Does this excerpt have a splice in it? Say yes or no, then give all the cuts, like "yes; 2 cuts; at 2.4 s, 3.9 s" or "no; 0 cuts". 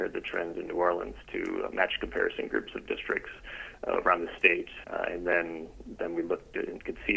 yes; 1 cut; at 4.8 s